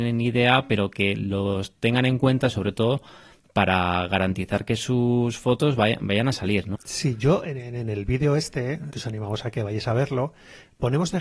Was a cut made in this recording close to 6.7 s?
yes; 2 cuts; at 6.7 s, 8.9 s

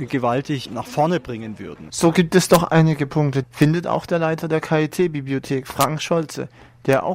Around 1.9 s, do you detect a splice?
yes; 2 cuts; at 1.9 s, 3.4 s

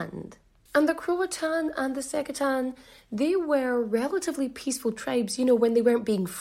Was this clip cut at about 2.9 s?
no; 0 cuts

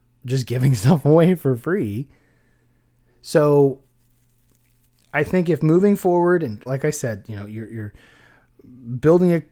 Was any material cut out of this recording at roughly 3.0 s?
no; 1 cut; at 6.7 s

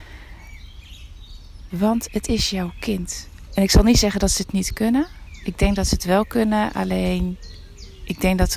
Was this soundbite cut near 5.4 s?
no; 2 cuts; at 1.7 s, 3.5 s

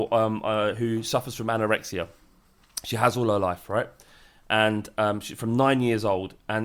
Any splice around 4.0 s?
no; 0 cuts

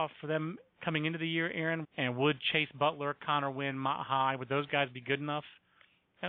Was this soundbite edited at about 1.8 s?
yes; 1 cut; at 1.8 s

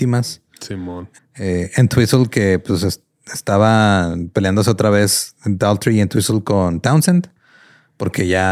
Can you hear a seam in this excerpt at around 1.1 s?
yes; 1 cut; at 1.1 s

